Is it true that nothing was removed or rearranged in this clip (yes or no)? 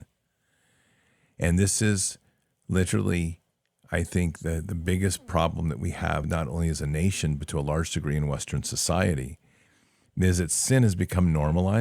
yes